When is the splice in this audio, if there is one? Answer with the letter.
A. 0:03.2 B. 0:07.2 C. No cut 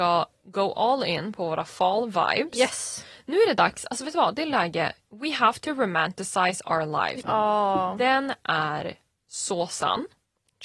B